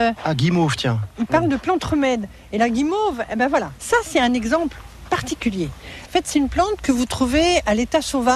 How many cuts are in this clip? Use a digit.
1